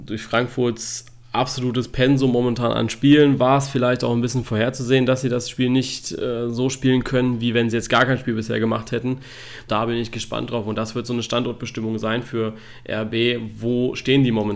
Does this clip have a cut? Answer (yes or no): yes